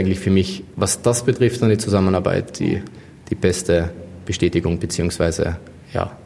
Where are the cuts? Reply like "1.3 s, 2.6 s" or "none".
none